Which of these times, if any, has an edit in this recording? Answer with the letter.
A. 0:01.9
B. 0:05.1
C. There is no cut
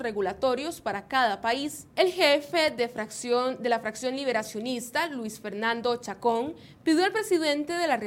A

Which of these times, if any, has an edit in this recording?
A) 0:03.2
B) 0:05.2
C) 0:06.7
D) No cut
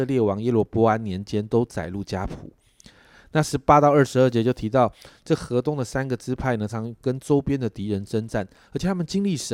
C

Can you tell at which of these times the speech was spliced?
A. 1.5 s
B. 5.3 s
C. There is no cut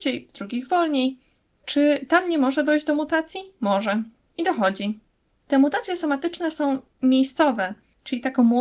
B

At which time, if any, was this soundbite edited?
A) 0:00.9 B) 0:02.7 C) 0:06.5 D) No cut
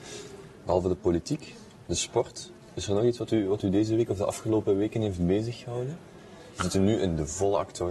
D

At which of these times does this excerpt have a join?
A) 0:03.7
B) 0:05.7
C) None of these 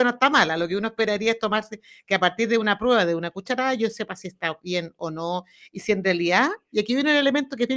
C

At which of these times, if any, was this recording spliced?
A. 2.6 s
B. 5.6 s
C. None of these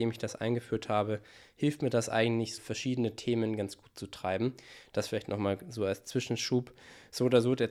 A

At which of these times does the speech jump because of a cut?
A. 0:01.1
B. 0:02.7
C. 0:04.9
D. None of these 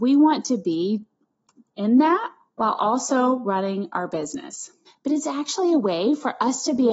C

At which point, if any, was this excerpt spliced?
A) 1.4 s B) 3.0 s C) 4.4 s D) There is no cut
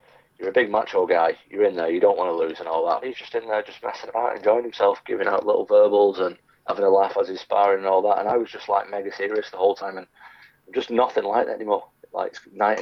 B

